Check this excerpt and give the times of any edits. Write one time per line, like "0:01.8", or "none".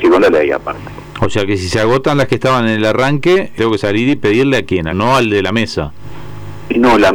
0:03.6
0:04.9